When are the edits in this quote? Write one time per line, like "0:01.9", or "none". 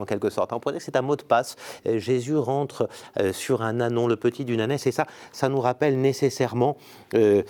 0:01.8